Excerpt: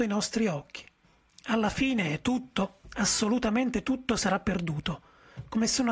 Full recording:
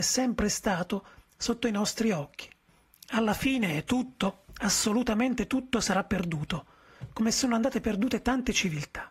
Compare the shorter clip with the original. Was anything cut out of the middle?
no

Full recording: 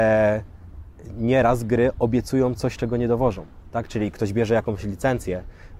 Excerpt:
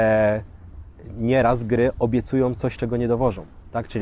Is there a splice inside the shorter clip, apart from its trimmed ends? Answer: no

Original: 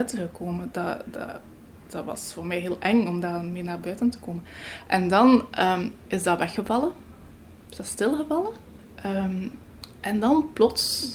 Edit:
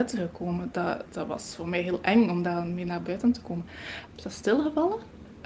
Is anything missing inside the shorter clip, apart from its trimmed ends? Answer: yes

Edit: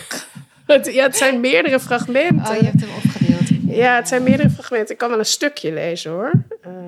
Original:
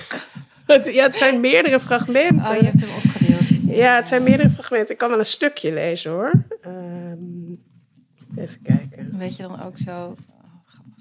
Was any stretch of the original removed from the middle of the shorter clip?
no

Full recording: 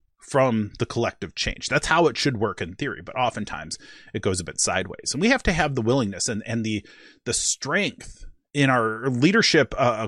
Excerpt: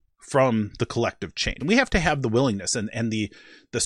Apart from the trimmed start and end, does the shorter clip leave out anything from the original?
yes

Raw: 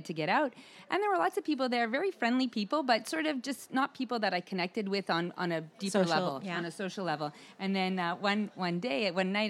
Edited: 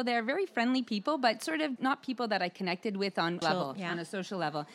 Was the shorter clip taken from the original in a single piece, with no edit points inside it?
no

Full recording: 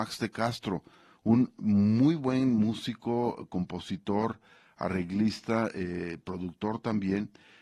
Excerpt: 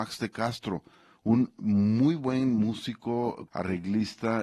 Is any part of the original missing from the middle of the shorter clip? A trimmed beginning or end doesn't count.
yes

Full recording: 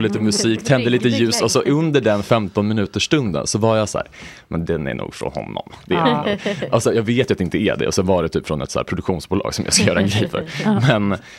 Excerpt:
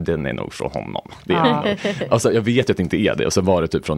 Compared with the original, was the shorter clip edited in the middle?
no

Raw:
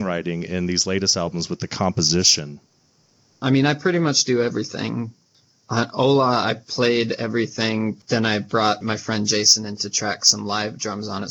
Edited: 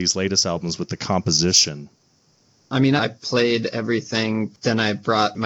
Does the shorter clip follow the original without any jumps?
no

